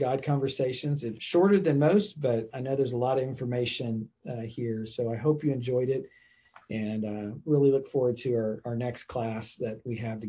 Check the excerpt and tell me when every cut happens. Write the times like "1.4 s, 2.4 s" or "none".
1.2 s